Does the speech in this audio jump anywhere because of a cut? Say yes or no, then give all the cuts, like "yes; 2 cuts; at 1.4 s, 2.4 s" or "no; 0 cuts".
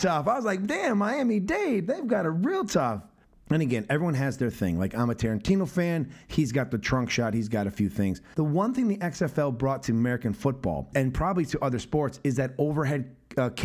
yes; 1 cut; at 8.3 s